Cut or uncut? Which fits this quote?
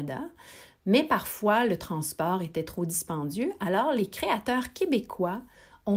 uncut